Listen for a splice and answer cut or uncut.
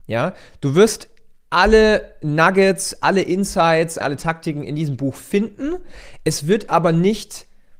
cut